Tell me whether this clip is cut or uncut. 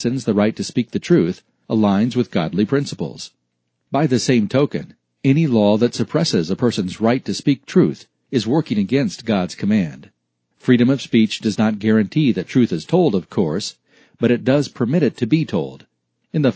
uncut